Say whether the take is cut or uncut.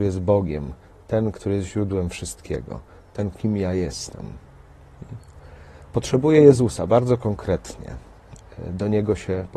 cut